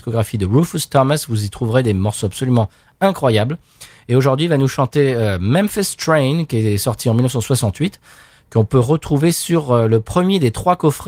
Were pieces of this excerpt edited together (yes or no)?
no